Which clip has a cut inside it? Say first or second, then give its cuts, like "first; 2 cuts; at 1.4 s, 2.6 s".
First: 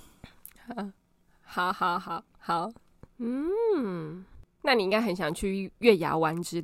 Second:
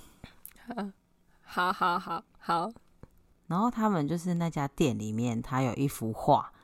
first; 1 cut; at 3.1 s